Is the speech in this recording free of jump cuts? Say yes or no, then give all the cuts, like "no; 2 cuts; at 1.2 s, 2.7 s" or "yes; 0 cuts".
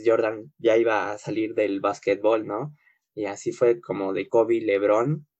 yes; 0 cuts